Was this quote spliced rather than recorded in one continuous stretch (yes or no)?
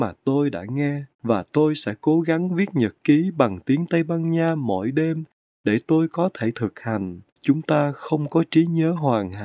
yes